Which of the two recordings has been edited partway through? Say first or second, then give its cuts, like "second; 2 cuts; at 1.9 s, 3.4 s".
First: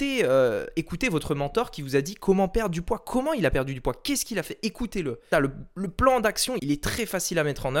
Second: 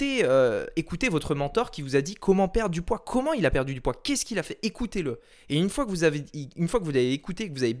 first; 2 cuts; at 5.3 s, 6.6 s